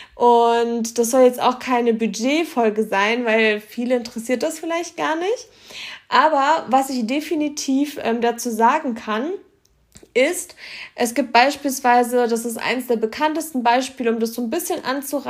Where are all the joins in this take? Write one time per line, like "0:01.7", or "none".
none